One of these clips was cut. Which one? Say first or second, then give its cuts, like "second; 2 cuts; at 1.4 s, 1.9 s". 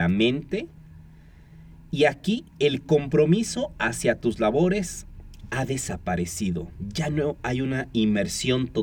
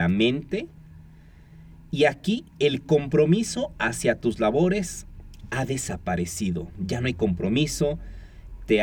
second; 1 cut; at 6.7 s